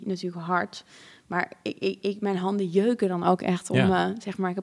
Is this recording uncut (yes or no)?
yes